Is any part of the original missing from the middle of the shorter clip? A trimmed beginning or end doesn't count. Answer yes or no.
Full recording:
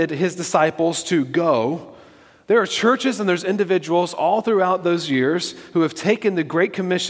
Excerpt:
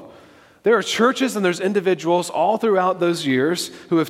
no